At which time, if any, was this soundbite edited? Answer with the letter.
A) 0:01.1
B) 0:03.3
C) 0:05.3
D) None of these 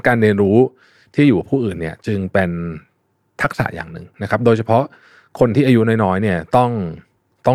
D